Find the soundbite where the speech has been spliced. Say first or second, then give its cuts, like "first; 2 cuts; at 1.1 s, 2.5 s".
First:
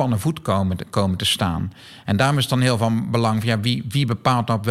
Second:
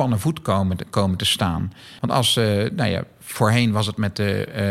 second; 1 cut; at 2.0 s